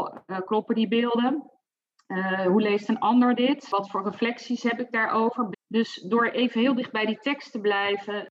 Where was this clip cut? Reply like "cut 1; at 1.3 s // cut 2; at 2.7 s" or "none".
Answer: cut 1; at 5.5 s